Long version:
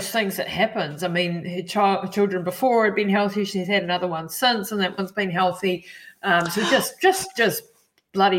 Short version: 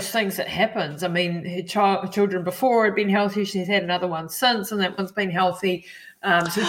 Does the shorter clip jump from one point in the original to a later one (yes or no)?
no